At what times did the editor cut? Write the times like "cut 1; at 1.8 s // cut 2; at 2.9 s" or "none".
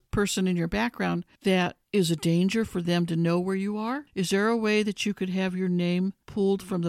none